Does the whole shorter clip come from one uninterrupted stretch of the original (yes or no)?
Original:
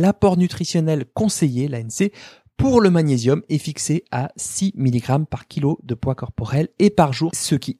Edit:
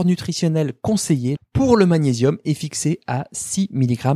no